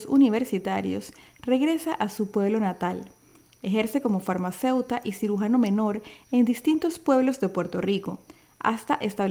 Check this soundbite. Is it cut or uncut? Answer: uncut